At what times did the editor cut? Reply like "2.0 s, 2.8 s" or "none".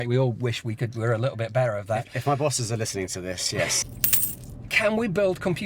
3.8 s